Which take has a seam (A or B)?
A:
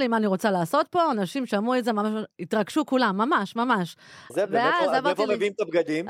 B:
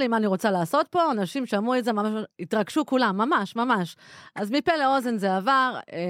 A